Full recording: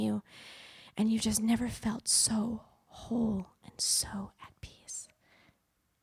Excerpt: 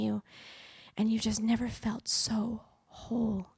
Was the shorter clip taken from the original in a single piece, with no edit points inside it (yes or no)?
yes